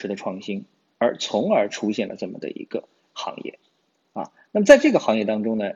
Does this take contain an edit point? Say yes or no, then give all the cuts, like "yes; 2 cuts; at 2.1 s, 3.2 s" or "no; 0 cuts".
no; 0 cuts